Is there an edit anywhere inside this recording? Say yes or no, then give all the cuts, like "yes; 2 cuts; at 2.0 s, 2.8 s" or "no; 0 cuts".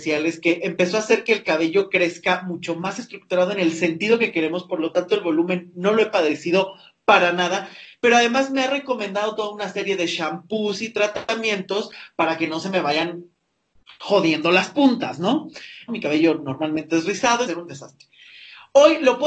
yes; 2 cuts; at 15.9 s, 17.5 s